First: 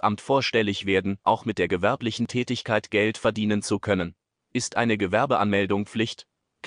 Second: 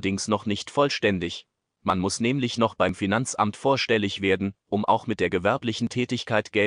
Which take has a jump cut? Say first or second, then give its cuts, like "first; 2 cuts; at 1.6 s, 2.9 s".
first; 1 cut; at 1.2 s